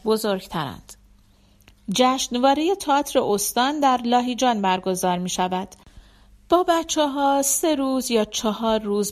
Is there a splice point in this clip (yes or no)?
no